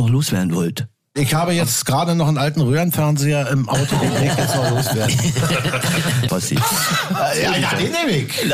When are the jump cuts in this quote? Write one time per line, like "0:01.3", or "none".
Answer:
0:06.3

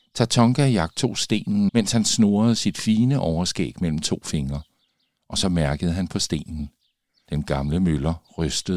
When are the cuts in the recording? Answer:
0:01.7
0:07.2

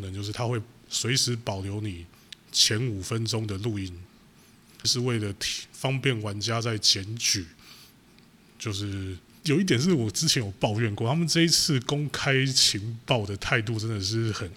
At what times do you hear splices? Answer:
0:04.8
0:09.4

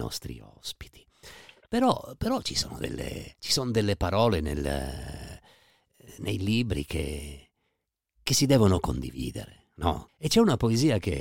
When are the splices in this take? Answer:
0:10.1

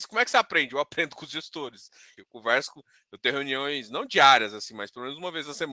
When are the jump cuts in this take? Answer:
0:02.2

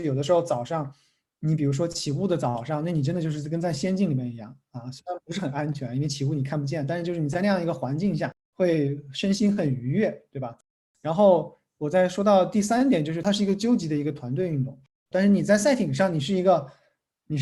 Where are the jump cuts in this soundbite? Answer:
0:15.1

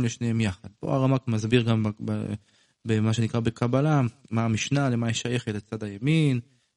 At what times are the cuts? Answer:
none

